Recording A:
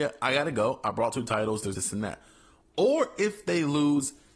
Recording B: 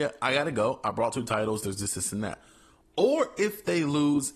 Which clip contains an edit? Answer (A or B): A